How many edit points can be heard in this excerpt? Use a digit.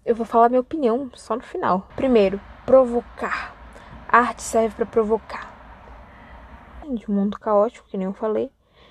2